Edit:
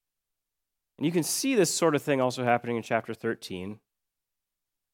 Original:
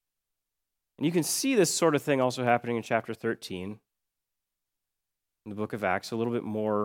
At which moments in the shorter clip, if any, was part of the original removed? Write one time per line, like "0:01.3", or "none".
none

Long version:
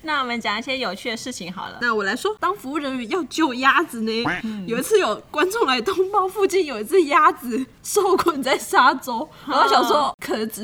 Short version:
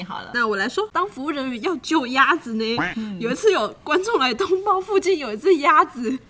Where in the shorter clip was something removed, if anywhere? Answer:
none

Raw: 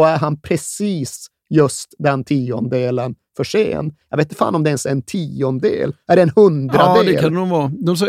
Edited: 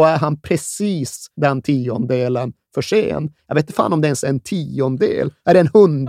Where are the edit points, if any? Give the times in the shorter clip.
0:01.3

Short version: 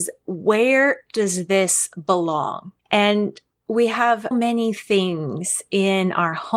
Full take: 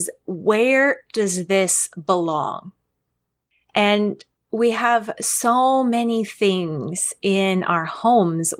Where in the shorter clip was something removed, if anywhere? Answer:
0:02.8
0:04.3

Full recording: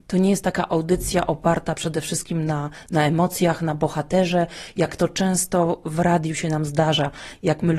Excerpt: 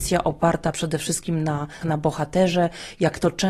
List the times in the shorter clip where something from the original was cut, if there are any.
0:01.8

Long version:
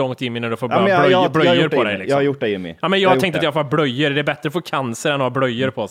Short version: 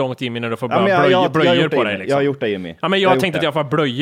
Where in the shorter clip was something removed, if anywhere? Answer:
none

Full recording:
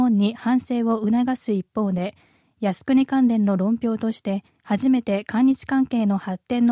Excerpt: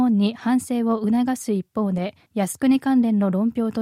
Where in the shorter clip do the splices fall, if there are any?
0:02.2

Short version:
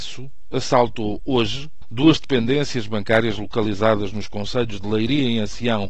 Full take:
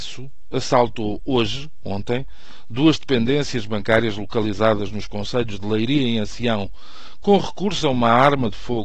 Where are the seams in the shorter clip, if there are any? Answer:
0:01.8

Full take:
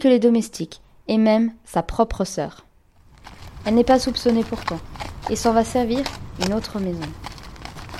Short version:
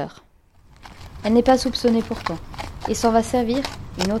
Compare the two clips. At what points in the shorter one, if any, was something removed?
none

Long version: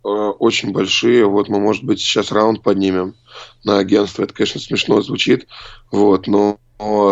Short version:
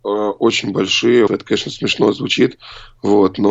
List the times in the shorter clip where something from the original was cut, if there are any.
0:01.3

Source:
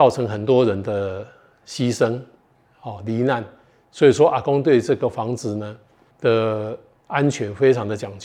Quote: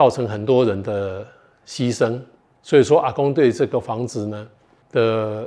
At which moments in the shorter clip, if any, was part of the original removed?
0:02.6

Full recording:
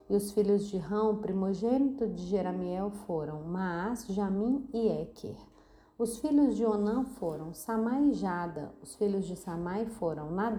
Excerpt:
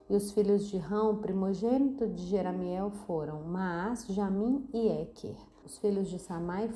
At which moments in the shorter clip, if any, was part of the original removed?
0:05.6

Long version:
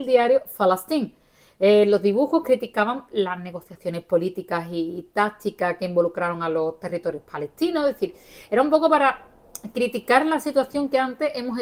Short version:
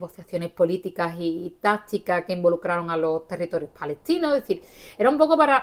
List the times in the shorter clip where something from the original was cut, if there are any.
none

